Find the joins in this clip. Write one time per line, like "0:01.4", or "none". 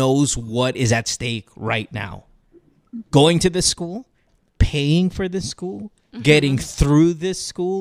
0:03.1